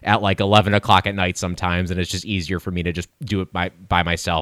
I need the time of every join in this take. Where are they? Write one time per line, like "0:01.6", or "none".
none